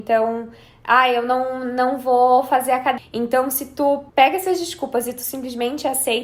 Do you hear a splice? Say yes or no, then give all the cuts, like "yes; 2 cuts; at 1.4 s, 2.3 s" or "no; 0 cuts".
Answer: yes; 2 cuts; at 3.0 s, 4.1 s